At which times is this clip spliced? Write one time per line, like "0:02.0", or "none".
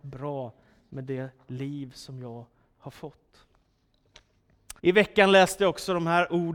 0:04.8